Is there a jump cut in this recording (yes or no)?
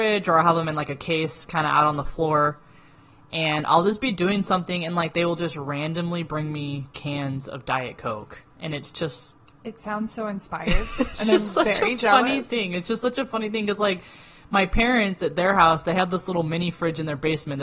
no